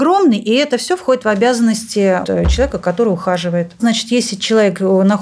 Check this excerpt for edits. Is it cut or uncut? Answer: cut